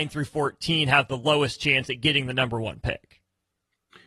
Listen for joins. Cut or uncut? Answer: uncut